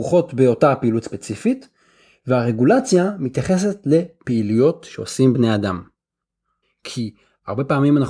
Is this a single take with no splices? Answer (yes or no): no